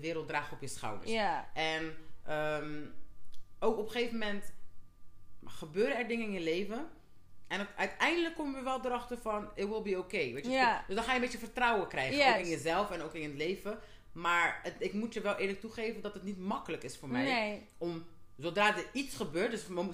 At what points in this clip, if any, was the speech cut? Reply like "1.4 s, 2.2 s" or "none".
none